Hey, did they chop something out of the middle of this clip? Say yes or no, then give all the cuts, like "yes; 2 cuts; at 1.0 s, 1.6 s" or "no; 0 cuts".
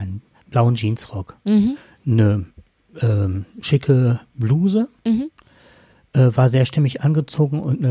no; 0 cuts